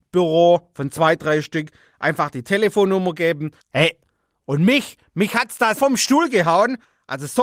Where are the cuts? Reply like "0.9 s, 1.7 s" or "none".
3.6 s, 5.8 s